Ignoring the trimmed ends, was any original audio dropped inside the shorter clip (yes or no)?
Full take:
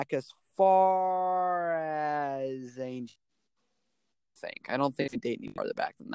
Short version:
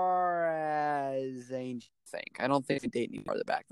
yes